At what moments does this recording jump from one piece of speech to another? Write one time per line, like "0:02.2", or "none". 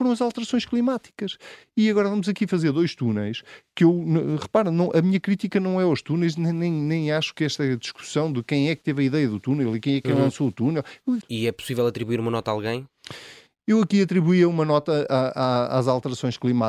0:11.2